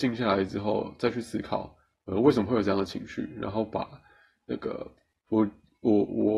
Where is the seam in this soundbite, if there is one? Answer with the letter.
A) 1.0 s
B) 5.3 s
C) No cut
B